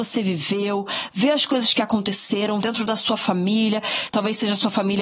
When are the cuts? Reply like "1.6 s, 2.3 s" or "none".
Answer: 2.6 s